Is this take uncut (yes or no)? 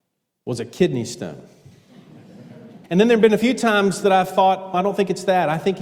no